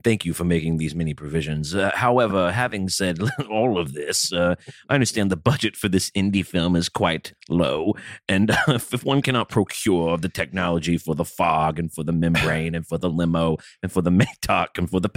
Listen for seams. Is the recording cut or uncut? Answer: uncut